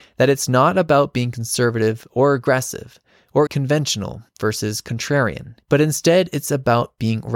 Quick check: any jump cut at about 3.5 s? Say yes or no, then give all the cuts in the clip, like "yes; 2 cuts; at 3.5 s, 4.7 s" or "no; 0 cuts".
yes; 2 cuts; at 3.5 s, 5.6 s